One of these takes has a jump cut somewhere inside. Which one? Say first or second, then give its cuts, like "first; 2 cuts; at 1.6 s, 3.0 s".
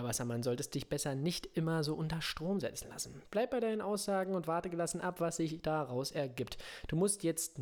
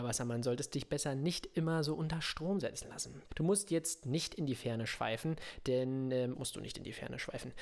second; 2 cuts; at 3.3 s, 6.3 s